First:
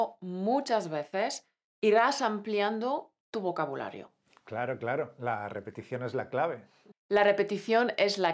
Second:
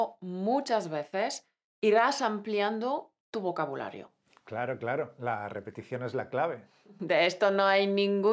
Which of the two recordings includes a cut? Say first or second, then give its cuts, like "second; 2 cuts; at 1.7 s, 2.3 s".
first; 1 cut; at 6.9 s